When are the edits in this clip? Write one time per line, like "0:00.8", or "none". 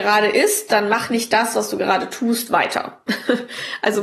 none